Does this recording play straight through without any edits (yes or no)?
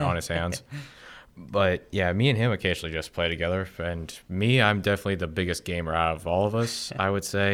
yes